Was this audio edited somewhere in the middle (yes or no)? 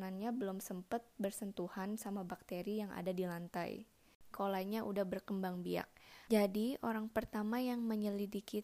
yes